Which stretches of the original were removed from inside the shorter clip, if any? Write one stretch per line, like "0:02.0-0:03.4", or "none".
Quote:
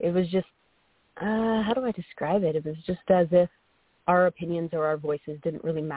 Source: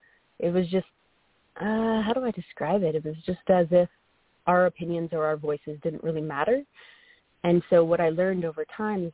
none